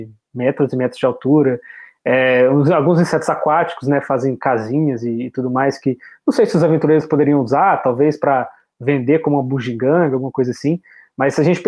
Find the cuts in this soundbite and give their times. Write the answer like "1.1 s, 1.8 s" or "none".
none